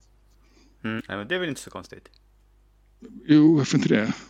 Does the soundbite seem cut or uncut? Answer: cut